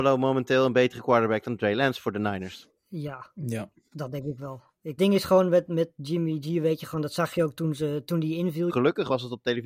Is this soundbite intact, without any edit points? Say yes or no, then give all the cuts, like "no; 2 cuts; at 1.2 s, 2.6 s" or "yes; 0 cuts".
no; 2 cuts; at 5.0 s, 8.7 s